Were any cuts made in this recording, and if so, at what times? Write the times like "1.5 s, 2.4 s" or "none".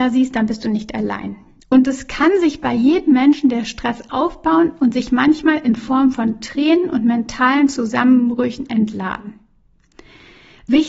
1.6 s